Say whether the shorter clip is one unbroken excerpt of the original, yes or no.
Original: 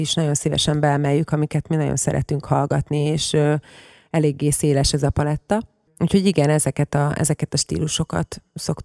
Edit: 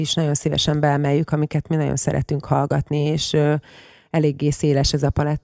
yes